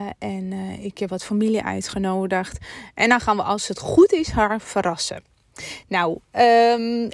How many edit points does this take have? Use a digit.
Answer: 0